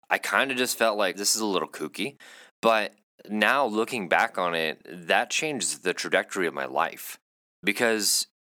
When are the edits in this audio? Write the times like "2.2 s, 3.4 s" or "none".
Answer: 1.1 s